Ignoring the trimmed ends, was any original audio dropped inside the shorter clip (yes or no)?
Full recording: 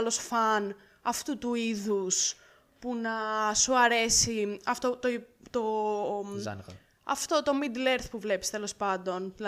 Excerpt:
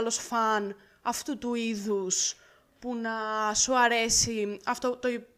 no